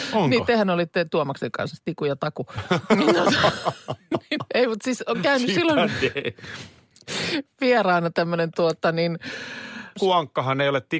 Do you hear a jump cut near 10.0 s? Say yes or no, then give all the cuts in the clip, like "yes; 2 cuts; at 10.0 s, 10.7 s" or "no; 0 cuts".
yes; 2 cuts; at 4.5 s, 10.0 s